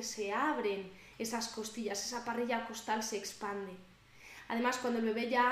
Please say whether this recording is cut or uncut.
uncut